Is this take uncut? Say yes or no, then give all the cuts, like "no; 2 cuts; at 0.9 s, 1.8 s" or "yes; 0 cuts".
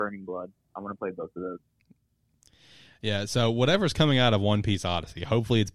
yes; 0 cuts